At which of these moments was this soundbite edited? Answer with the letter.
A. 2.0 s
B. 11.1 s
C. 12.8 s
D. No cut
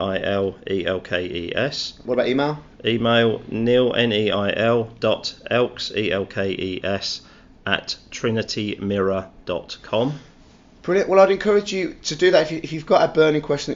A